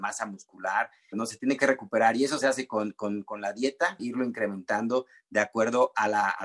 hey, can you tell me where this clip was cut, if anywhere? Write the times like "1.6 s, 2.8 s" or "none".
1.1 s, 4.0 s